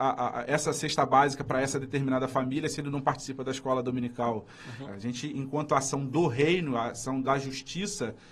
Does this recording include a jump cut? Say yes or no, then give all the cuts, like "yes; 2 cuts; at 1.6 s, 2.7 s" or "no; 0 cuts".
yes; 1 cut; at 4.8 s